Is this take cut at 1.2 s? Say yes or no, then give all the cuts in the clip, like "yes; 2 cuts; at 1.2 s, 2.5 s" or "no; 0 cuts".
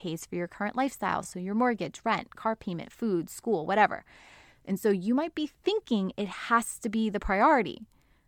no; 0 cuts